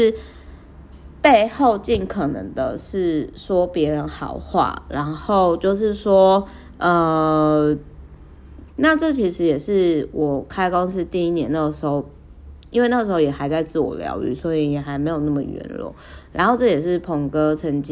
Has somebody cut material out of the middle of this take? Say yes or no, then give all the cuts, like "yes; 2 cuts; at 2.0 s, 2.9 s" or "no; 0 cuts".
yes; 1 cut; at 8.7 s